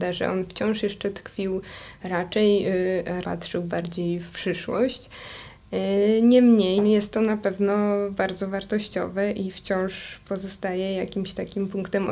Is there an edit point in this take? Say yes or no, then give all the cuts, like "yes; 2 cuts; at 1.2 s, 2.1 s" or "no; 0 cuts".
yes; 2 cuts; at 3.2 s, 6.8 s